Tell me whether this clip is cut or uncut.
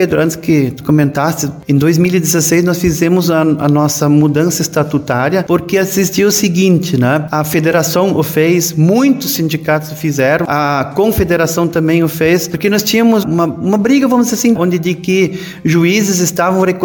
cut